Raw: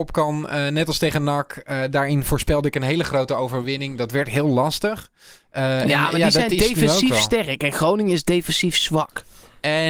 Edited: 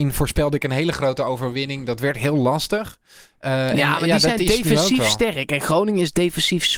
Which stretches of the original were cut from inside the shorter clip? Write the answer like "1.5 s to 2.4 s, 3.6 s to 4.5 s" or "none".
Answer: none